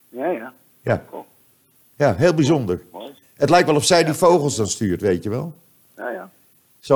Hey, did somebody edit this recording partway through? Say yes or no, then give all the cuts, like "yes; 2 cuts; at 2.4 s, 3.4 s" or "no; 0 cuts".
yes; 1 cut; at 5.9 s